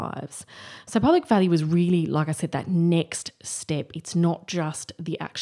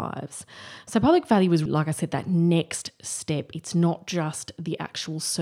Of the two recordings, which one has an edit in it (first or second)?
second